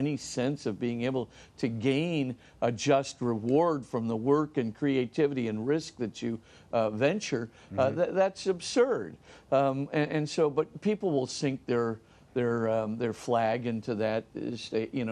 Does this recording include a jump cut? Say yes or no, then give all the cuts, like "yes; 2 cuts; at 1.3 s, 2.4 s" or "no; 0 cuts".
no; 0 cuts